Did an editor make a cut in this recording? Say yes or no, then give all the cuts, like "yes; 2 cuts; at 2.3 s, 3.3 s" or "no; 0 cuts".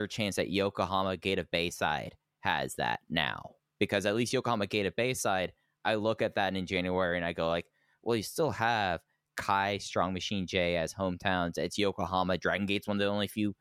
no; 0 cuts